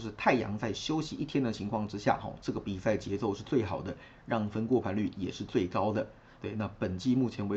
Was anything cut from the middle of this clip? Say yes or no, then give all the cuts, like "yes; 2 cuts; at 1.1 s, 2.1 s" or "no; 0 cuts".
no; 0 cuts